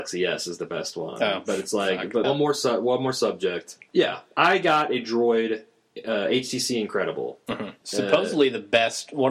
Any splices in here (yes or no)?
yes